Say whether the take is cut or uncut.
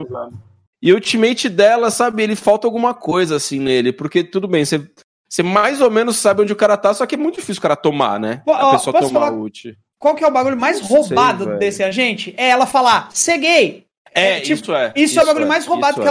uncut